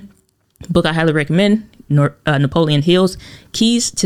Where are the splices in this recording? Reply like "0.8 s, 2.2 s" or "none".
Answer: none